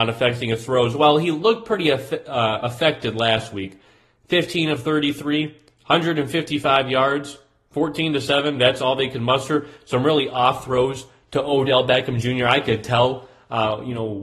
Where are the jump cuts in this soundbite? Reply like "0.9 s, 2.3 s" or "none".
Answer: none